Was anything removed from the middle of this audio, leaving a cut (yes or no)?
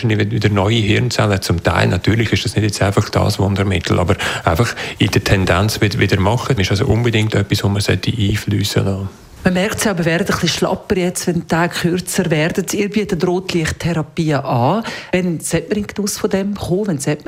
yes